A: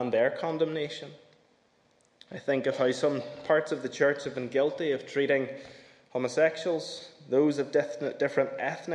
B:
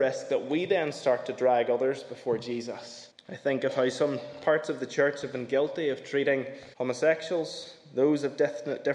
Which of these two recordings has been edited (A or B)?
B